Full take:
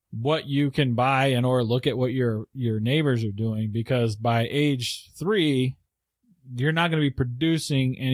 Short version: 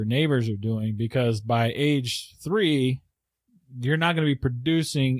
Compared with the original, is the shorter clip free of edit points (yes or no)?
yes